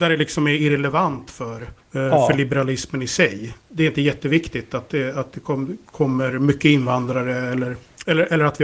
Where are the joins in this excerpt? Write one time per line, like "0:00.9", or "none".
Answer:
none

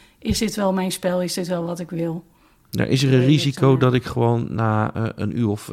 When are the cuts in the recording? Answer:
0:02.7

